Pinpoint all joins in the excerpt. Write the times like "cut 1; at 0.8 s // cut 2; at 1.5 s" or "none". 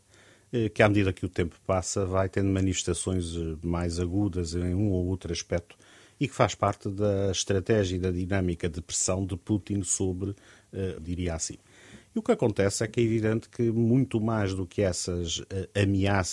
cut 1; at 11.0 s